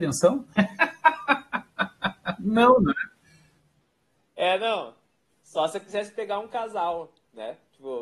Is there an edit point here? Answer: no; 0 cuts

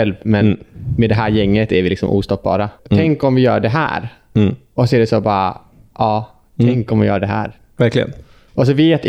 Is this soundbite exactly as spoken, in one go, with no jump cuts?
no; 1 cut; at 2.8 s

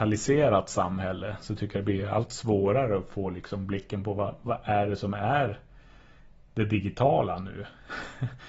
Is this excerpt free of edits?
yes; 0 cuts

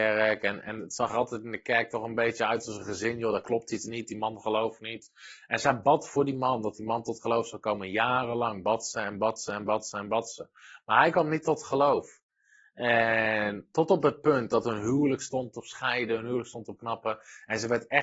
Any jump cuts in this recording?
no; 0 cuts

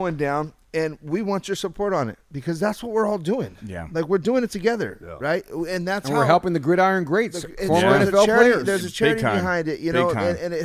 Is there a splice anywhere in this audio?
no; 0 cuts

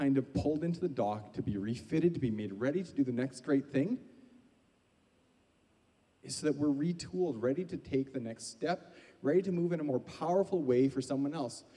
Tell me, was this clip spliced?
no; 0 cuts

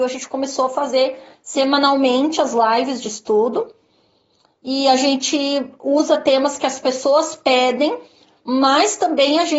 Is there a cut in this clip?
no; 0 cuts

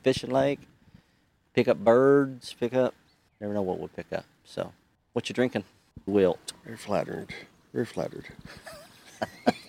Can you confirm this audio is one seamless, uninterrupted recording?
no; 1 cut; at 6.1 s

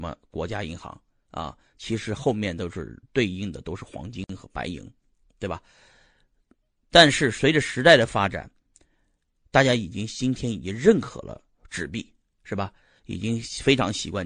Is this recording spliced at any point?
no; 0 cuts

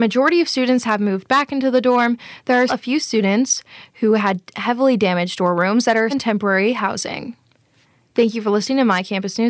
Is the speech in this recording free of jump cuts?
no; 2 cuts; at 2.7 s, 6.1 s

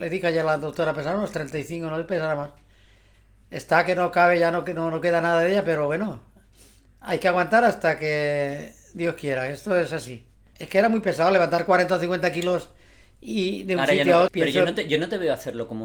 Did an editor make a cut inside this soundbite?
yes; 2 cuts; at 10.5 s, 14.3 s

